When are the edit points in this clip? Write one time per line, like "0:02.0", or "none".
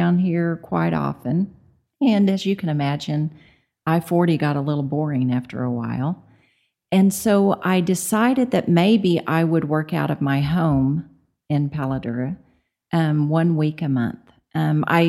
none